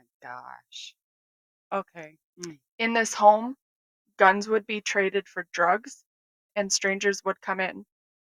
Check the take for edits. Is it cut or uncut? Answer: cut